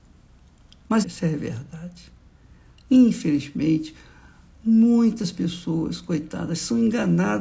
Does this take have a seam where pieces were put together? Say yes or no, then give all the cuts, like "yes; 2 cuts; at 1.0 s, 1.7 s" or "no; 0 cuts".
yes; 1 cut; at 1.0 s